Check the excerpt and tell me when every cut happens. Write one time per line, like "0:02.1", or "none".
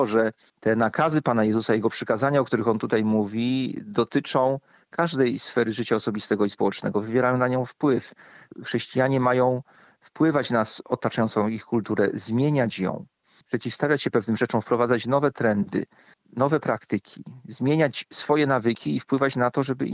none